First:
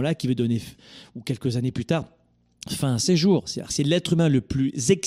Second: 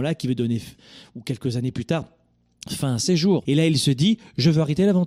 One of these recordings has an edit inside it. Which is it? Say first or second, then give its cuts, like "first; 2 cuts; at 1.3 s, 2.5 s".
second; 1 cut; at 3.4 s